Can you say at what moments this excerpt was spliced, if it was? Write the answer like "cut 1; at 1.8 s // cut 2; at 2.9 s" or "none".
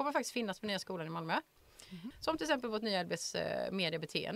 cut 1; at 2.1 s